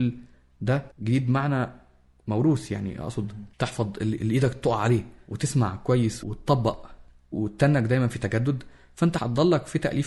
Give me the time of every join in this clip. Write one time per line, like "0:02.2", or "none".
0:00.9